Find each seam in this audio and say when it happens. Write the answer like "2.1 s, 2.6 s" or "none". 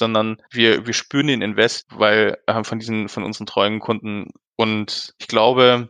none